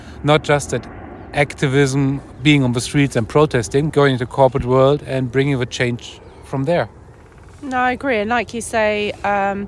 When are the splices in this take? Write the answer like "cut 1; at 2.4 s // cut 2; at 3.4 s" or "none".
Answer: cut 1; at 3.9 s